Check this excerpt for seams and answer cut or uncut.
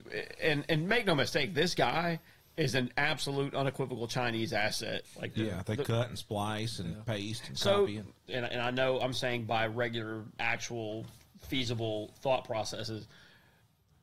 cut